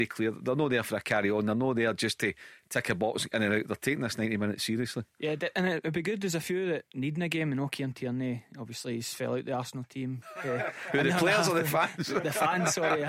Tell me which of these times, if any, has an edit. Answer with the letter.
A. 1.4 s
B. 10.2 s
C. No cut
B